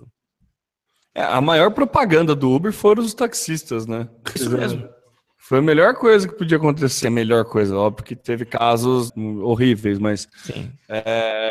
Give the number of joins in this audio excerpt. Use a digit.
3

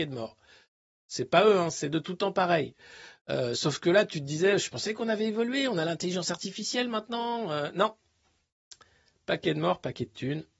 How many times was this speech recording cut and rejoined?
0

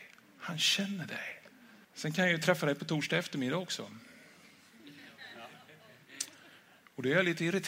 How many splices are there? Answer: 1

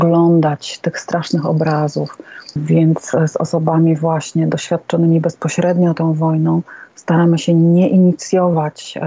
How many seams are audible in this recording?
1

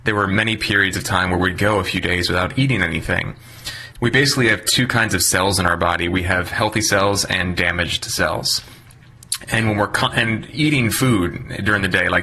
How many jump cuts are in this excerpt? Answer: 1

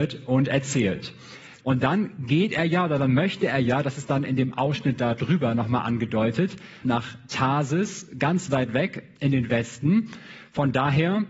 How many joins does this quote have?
2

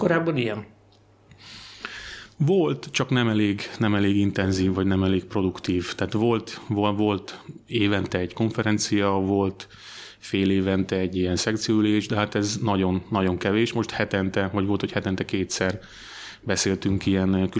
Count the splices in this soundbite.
0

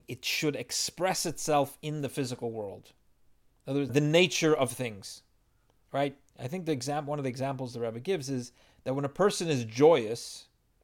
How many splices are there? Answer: 1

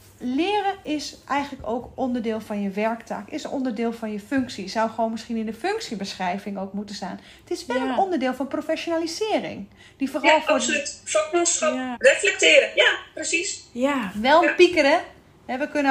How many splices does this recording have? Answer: 1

